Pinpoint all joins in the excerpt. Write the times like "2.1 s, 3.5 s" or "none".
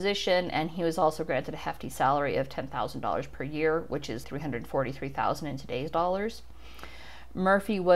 4.2 s